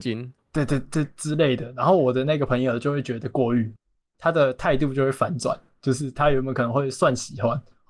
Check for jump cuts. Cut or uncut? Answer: uncut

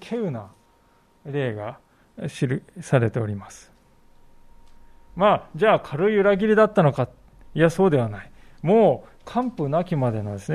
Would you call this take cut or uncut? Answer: uncut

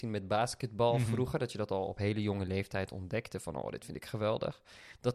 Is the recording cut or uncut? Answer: uncut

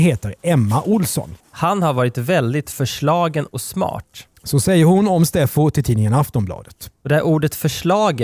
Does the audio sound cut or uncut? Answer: cut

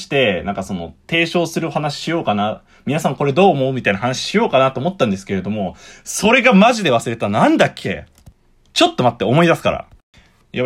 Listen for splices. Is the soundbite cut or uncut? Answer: uncut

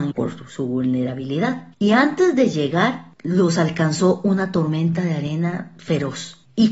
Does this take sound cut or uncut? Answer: cut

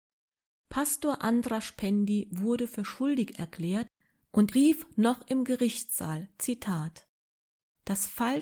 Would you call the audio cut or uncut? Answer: cut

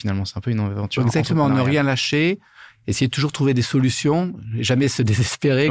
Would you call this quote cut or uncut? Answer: uncut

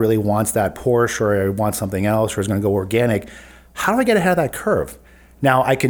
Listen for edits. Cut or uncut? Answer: uncut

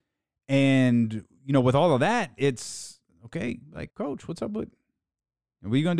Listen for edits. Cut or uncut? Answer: cut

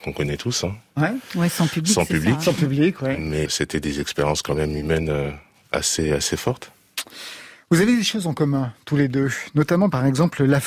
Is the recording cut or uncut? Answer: cut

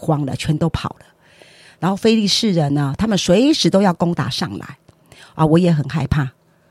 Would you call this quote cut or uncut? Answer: uncut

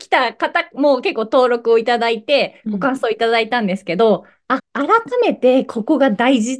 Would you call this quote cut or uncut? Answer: cut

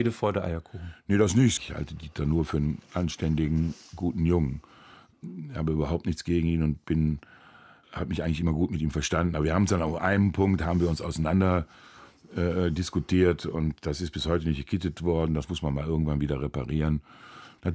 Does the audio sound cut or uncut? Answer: cut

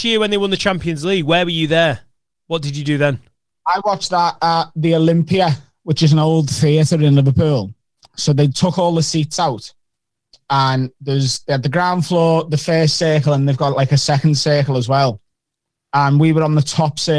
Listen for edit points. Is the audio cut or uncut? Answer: uncut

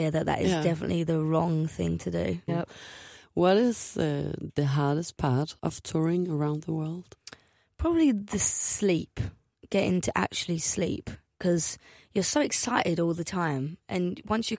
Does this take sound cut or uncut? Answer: cut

